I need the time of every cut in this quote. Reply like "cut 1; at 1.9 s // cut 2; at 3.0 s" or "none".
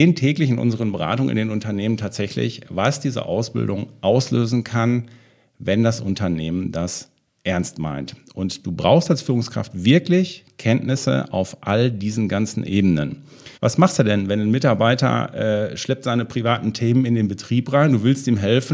cut 1; at 13.5 s